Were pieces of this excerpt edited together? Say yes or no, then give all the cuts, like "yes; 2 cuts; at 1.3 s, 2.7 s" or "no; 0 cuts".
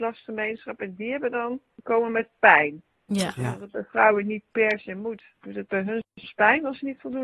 no; 0 cuts